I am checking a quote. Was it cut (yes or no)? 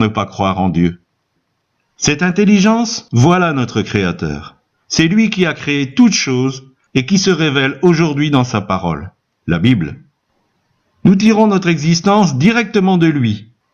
no